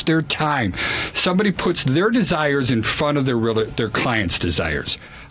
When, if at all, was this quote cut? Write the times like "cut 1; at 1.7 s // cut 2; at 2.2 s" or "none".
none